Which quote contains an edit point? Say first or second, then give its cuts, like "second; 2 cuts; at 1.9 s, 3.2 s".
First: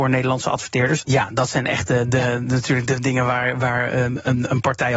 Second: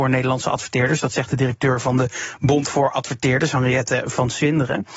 first; 1 cut; at 1.0 s